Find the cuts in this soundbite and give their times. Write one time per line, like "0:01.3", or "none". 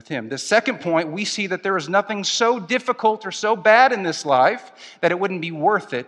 none